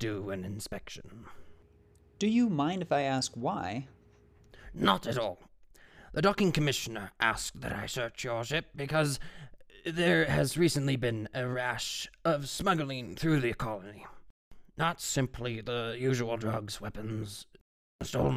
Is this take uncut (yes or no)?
yes